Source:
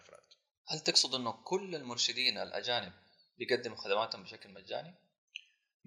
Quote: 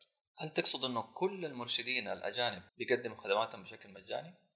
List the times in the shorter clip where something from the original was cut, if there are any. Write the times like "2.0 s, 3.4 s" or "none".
2.7 s